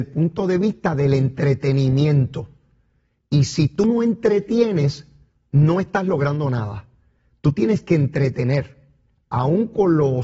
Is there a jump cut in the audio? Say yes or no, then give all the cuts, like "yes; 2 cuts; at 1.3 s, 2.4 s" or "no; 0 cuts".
no; 0 cuts